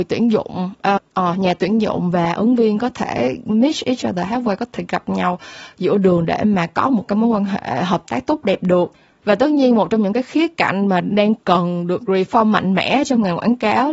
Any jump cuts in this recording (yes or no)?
yes